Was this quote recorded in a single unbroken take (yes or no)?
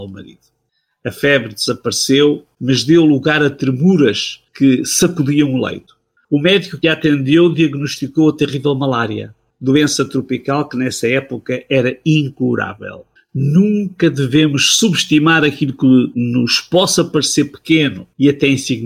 no